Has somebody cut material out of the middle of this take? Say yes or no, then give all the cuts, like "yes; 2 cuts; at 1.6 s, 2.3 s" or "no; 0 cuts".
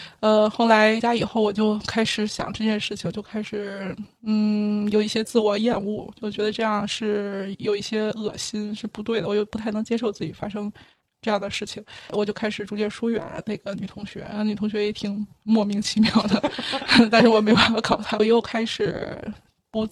yes; 1 cut; at 18.2 s